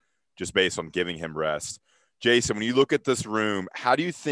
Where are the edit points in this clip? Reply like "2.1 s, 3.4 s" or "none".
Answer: none

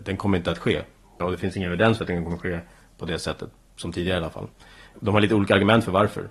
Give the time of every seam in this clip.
none

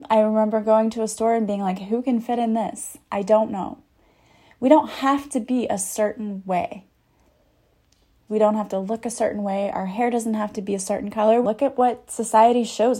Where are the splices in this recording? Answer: 8.3 s, 11.4 s

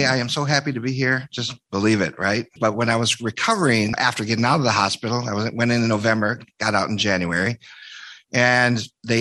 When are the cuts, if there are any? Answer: 2.6 s

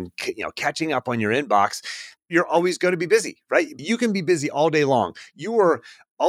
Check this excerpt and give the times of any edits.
2.2 s, 3.8 s

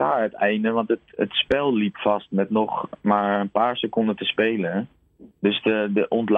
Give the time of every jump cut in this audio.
5.3 s

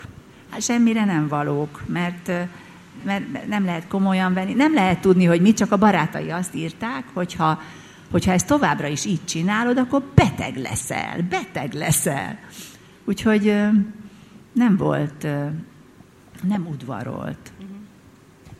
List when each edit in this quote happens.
3.0 s

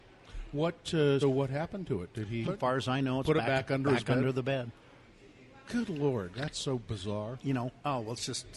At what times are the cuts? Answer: 1.2 s, 2.4 s, 7.4 s

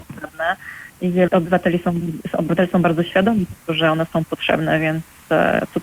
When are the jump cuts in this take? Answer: 1.3 s

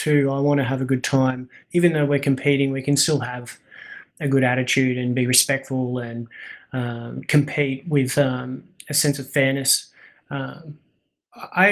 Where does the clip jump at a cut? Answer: none

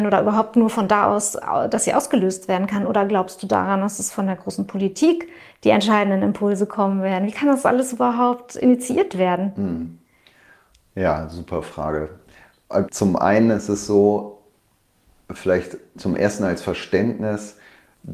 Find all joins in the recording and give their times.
12.9 s, 15.9 s

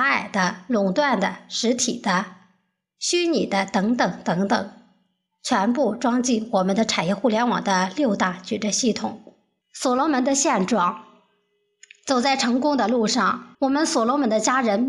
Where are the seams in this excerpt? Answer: 9.6 s, 13.5 s

